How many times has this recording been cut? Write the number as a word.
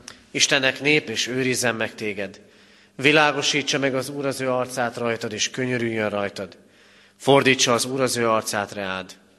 one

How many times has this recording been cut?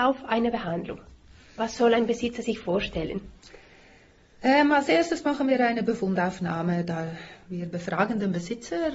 zero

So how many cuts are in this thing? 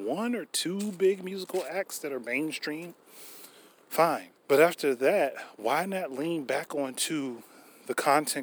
one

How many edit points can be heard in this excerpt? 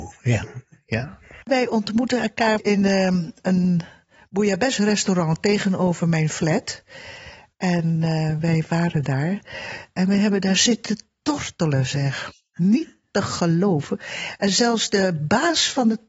zero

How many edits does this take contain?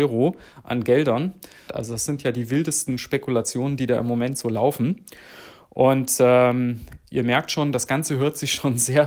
one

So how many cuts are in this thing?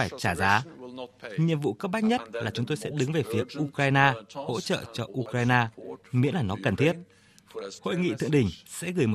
one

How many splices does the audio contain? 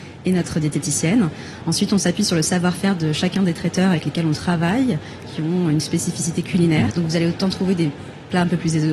one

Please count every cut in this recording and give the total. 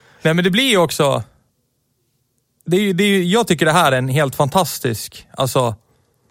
zero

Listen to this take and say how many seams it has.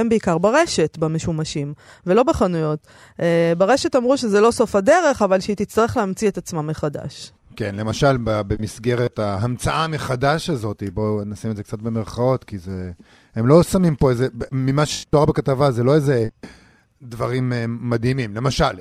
one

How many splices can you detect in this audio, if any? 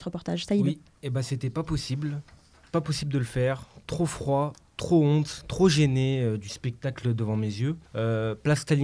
one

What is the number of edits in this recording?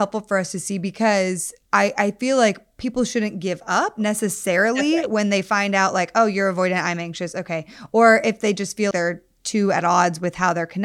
one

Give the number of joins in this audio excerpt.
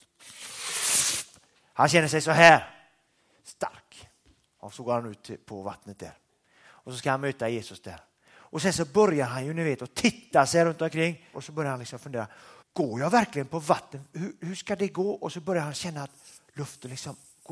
two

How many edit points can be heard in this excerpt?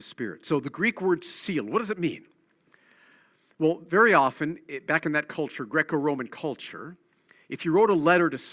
zero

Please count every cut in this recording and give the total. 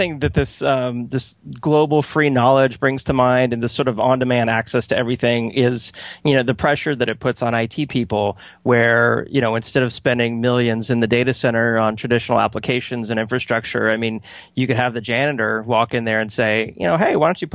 zero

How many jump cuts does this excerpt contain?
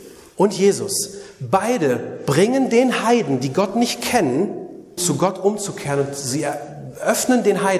one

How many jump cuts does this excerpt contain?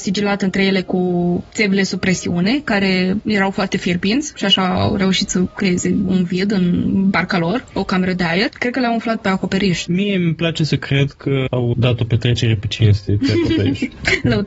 two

